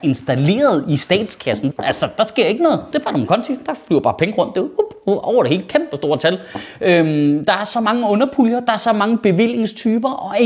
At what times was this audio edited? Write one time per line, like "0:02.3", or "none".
0:01.7
0:02.9